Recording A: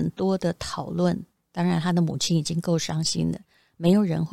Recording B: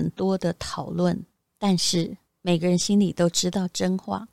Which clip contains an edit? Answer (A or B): B